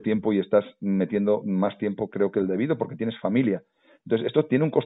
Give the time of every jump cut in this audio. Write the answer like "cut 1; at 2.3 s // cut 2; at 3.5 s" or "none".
none